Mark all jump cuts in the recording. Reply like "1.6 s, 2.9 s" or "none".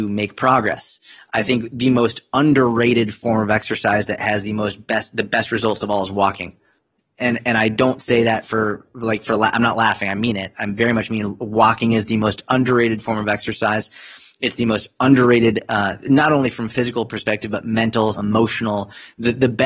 18.1 s